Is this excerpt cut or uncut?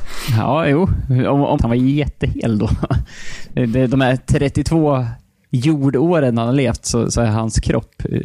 cut